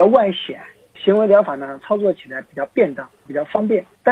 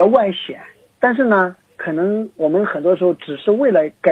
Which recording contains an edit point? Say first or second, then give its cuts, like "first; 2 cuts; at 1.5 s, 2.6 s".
second; 1 cut; at 0.9 s